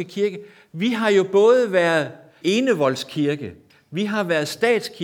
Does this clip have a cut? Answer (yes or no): yes